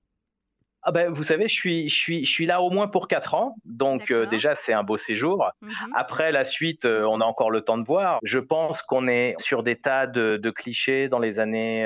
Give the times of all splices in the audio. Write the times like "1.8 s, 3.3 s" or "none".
8.2 s, 9.4 s